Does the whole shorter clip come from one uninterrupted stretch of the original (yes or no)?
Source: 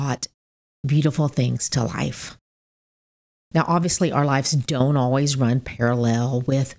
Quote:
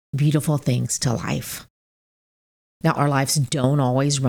no